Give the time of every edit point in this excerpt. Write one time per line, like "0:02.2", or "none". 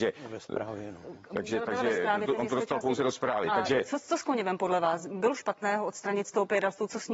none